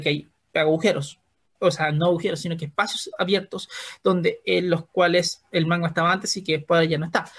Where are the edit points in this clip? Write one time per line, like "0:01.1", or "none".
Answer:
none